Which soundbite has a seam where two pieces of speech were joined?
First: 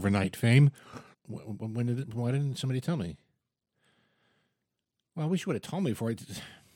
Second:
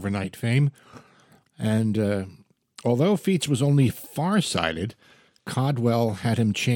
first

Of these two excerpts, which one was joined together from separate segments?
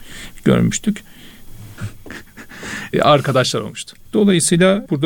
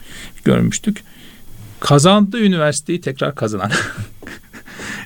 first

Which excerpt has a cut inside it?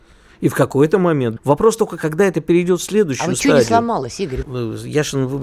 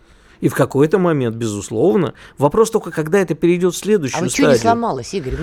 first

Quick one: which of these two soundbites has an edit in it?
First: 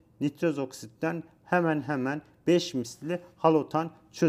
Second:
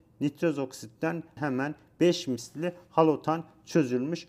second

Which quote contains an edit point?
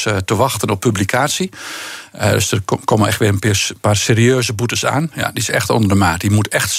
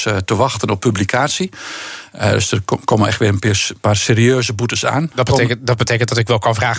first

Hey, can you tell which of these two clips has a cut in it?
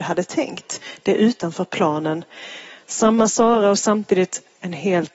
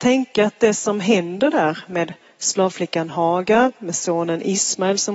first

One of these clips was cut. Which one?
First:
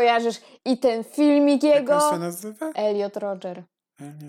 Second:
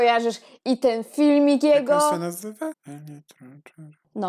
second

